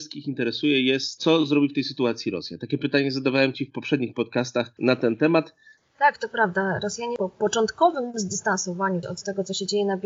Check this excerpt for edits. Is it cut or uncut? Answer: cut